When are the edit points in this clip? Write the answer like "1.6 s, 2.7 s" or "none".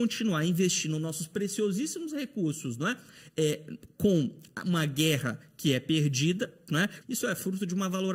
7.0 s

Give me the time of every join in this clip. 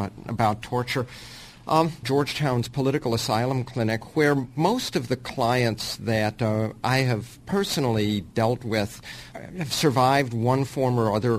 2.0 s, 9.3 s

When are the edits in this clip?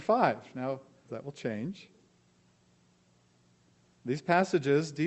1.1 s

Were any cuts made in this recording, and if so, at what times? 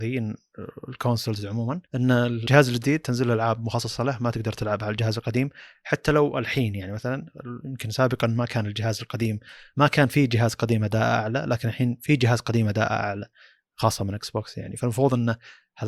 1.9 s

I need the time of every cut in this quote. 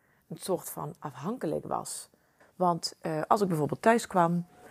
2.4 s

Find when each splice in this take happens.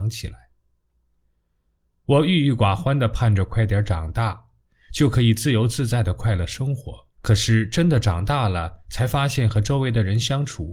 4.7 s, 7.1 s

